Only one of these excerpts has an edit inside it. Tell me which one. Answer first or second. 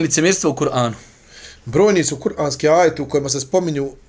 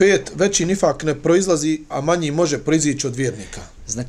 second